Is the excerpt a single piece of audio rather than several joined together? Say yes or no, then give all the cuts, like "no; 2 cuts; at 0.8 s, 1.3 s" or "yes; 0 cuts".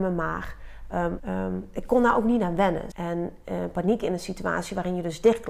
no; 2 cuts; at 1.2 s, 2.9 s